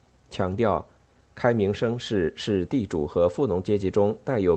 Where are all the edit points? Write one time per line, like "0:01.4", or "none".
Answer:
none